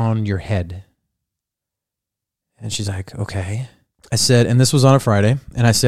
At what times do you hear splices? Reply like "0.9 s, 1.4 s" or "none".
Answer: none